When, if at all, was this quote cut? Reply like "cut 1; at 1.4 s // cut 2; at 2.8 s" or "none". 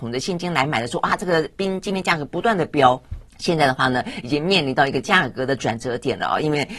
cut 1; at 3.3 s